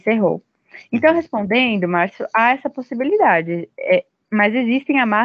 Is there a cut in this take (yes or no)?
no